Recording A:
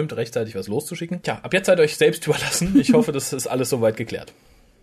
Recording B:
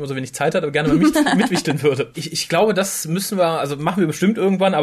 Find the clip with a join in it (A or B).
B